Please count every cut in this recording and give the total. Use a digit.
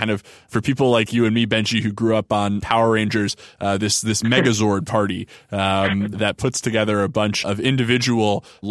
0